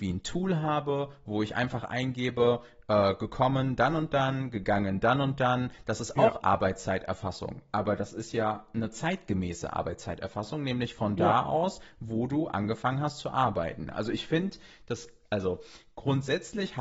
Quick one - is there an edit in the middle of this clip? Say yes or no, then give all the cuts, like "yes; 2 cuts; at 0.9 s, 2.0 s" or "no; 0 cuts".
no; 0 cuts